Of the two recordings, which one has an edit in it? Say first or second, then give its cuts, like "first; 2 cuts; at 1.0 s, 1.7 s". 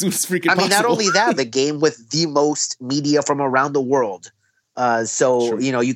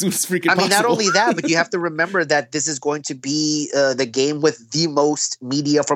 first; 1 cut; at 1.4 s